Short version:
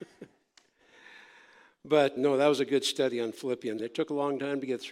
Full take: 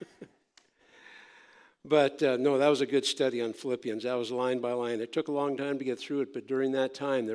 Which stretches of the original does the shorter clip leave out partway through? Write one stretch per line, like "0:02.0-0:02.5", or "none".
0:02.2-0:02.4
0:04.0-0:05.0